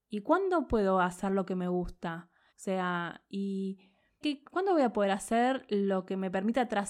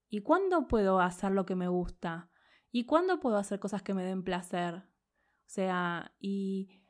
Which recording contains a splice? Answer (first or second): first